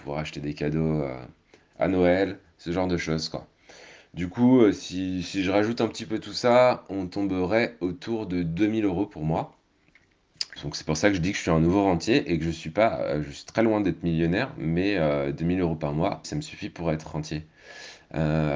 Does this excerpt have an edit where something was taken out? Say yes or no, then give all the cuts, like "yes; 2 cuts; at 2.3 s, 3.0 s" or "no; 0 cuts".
yes; 2 cuts; at 10.6 s, 16.2 s